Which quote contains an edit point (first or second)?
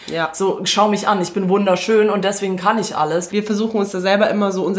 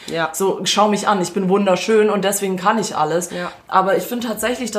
first